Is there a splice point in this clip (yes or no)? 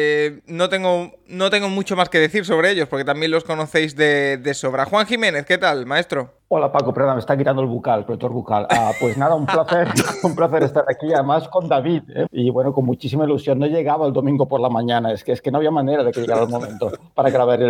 yes